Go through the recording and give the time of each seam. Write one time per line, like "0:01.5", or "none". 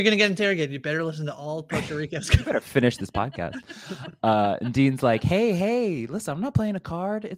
none